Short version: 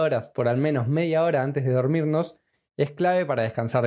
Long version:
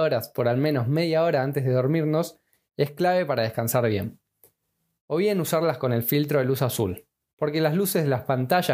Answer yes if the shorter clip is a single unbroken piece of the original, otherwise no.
yes